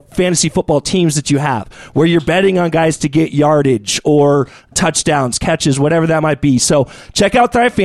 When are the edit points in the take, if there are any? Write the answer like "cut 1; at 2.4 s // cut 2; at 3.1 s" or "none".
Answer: cut 1; at 4.7 s

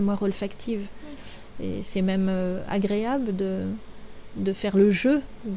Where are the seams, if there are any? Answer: cut 1; at 1.5 s

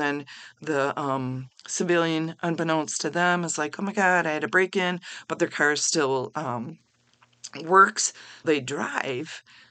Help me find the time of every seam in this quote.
cut 1; at 8.4 s

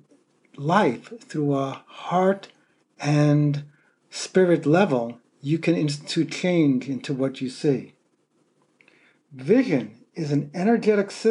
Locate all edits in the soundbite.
none

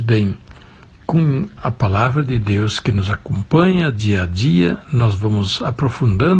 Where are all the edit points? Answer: cut 1; at 1.6 s

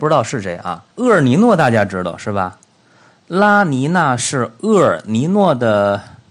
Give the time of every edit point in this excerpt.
cut 1; at 0.9 s

